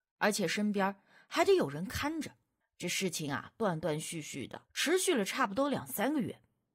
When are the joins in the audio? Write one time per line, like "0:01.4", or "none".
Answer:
0:02.6
0:04.7